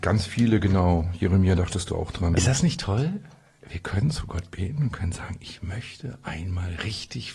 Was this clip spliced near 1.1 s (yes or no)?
no